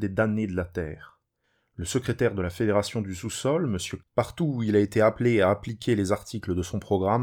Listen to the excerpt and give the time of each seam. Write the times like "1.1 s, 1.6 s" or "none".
4.0 s